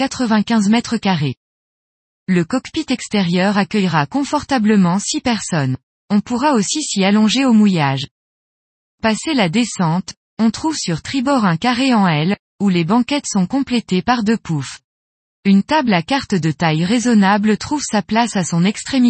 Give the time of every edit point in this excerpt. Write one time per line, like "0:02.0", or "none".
none